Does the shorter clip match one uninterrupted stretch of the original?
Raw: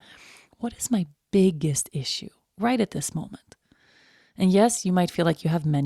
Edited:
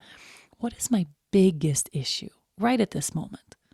yes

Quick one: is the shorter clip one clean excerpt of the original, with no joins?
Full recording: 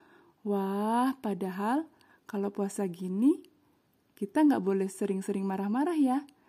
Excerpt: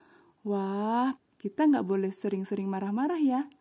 no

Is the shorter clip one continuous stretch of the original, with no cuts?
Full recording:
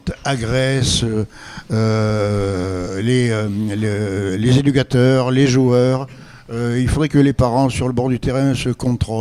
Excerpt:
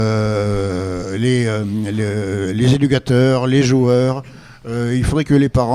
yes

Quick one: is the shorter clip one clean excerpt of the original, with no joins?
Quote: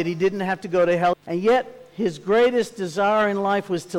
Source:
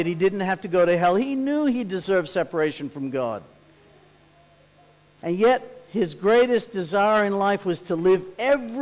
no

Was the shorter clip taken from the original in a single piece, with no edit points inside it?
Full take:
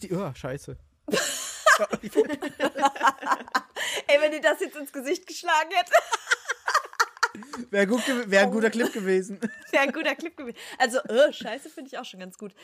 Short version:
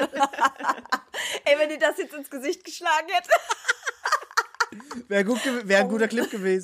yes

